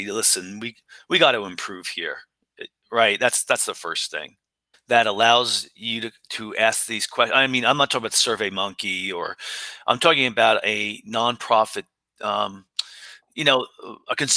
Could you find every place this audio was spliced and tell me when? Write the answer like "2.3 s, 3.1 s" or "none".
4.7 s